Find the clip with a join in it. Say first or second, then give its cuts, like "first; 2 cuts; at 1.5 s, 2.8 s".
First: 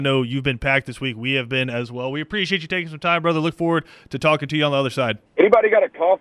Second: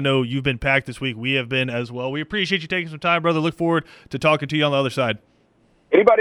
first; 1 cut; at 5.3 s